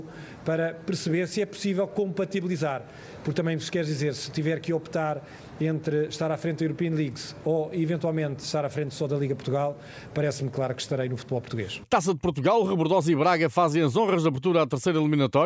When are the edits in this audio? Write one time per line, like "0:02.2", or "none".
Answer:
0:11.8